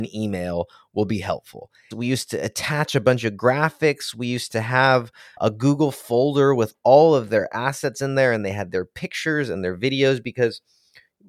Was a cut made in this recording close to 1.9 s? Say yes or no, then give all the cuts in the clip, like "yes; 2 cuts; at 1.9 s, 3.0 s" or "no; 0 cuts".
yes; 1 cut; at 1.9 s